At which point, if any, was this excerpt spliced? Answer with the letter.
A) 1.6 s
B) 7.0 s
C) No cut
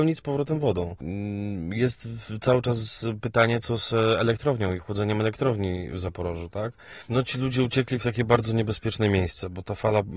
B